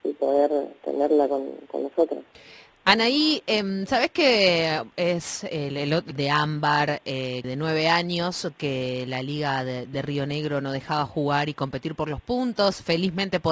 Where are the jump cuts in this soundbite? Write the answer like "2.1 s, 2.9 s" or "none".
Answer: 6.1 s, 7.4 s

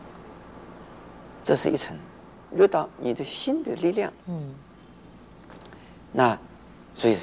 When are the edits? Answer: 2.5 s, 4.2 s

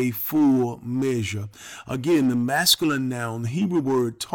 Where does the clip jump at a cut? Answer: none

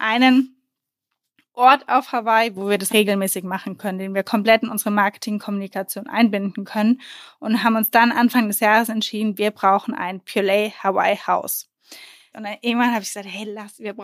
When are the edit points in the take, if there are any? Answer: 2.9 s, 12.3 s

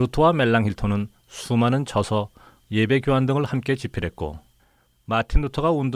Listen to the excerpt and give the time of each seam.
2.6 s

